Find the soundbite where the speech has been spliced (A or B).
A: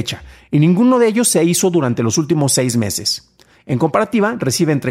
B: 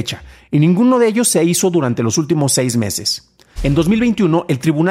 B